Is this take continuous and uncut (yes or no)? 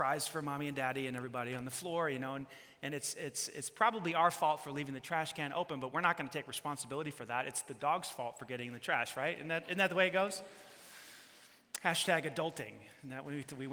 yes